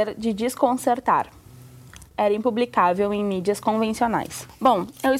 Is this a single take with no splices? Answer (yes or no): no